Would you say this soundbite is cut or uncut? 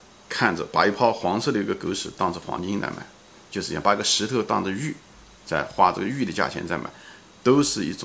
uncut